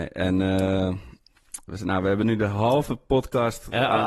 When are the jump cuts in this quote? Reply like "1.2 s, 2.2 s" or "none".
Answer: 1.7 s